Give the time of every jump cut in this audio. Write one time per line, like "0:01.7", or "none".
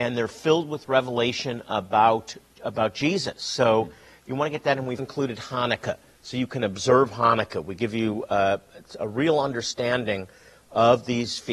0:02.6
0:05.0